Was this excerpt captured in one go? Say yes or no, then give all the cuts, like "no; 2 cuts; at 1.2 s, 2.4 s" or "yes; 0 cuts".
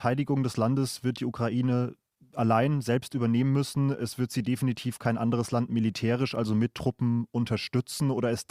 yes; 0 cuts